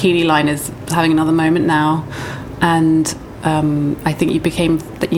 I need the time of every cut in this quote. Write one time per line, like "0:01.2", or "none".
none